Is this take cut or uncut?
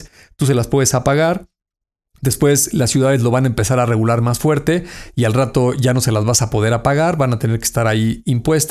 uncut